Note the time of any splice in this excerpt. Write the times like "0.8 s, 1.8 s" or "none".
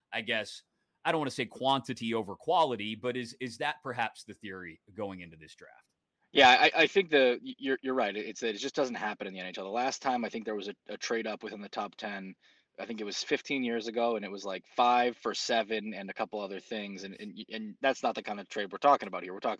none